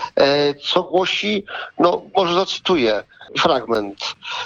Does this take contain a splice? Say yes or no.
yes